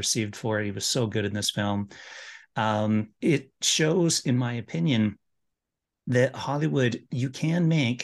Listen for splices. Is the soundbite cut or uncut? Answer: uncut